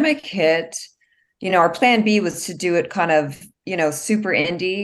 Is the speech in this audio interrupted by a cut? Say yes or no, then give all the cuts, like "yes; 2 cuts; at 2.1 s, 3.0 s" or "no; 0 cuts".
no; 0 cuts